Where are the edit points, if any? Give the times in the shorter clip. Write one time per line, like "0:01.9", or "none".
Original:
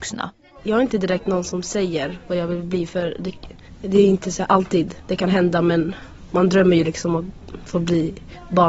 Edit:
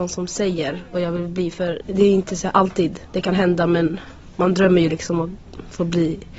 0:01.8